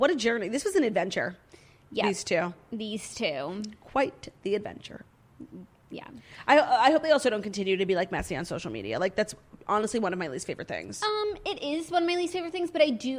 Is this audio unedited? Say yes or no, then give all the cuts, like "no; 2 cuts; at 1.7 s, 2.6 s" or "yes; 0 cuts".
yes; 0 cuts